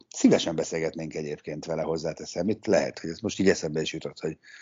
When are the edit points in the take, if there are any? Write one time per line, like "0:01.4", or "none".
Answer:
none

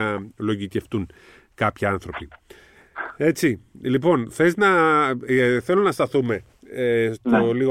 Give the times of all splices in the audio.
none

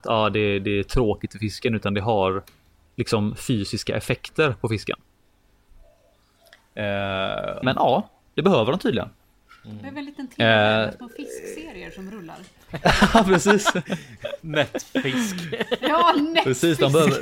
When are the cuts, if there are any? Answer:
0:07.6

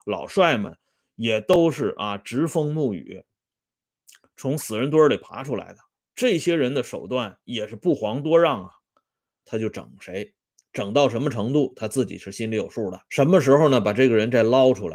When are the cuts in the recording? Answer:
0:09.4
0:13.1

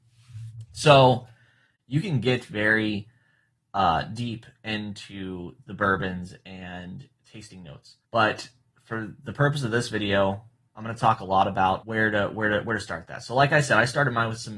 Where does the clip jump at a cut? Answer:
0:08.0

